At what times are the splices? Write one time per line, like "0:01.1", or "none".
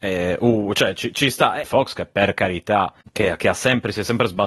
0:01.6
0:03.0